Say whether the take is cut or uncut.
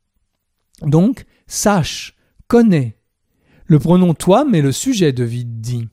uncut